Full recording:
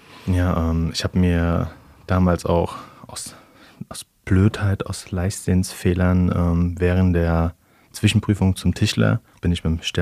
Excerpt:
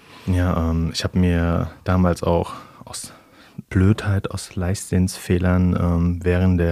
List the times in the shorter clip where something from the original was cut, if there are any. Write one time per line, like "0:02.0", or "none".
0:01.8
0:03.6